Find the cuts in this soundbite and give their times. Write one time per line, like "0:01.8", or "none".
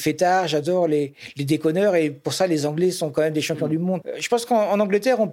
none